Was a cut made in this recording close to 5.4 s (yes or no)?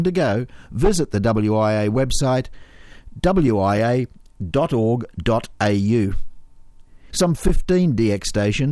no